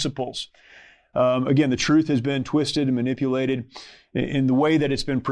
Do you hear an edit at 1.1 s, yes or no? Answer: yes